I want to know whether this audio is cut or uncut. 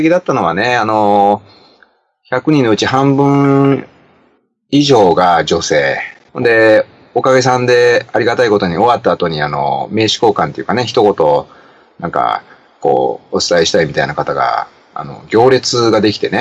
cut